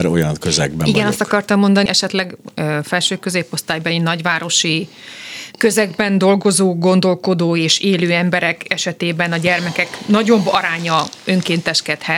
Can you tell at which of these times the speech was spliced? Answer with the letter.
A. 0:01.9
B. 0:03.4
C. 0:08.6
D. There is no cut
A